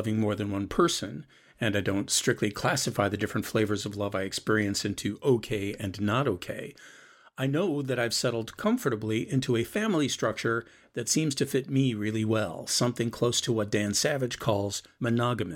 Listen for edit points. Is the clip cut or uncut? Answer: cut